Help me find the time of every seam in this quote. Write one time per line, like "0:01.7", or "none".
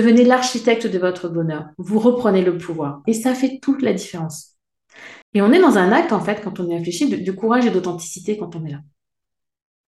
0:03.0
0:05.2